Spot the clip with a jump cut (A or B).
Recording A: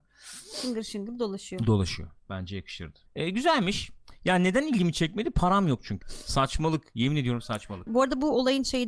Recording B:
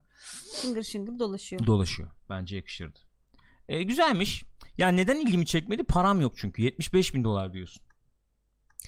A